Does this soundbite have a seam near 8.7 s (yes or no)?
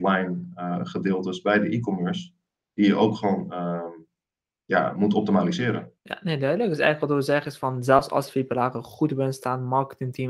no